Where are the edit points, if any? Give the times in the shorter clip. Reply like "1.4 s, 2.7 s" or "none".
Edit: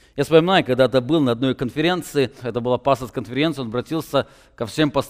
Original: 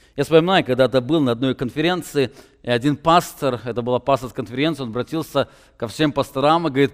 2.4 s